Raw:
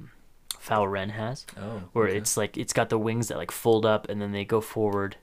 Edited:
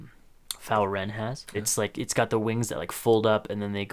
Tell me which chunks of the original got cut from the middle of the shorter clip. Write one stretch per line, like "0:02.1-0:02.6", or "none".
0:01.5-0:02.1